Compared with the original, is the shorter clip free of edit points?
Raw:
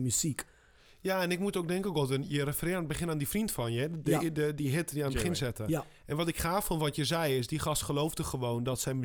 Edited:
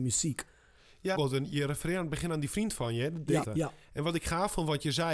no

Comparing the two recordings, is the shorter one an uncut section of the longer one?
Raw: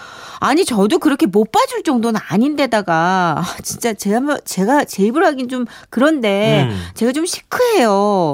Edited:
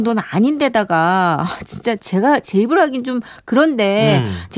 no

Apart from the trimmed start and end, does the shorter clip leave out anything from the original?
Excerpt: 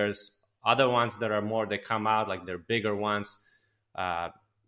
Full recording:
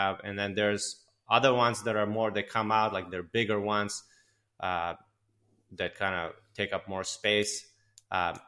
no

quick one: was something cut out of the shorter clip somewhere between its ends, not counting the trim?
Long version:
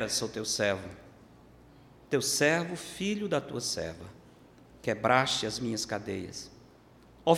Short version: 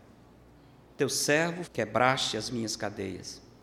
yes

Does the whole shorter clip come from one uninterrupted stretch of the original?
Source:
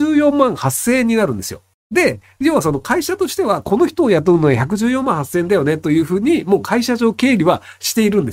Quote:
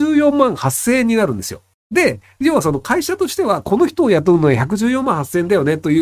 yes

